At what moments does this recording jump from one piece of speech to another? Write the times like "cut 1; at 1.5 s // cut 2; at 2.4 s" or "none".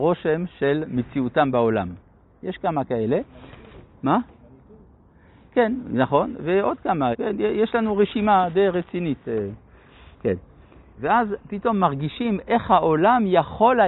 cut 1; at 7.1 s // cut 2; at 11.0 s